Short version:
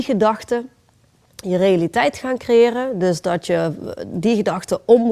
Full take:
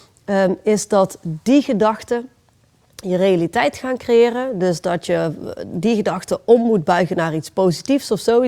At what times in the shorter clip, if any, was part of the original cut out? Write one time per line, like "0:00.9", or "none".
none